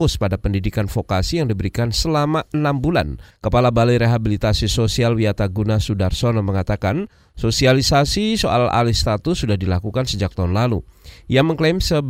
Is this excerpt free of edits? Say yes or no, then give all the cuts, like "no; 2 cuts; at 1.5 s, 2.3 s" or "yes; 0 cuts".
no; 1 cut; at 3.3 s